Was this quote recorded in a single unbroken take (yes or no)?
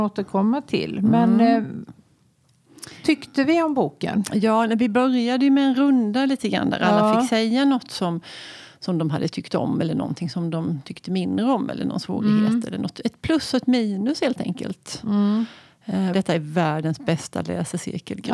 no